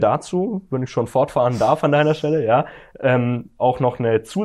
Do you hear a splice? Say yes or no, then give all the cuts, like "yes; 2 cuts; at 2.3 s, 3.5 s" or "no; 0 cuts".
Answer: no; 0 cuts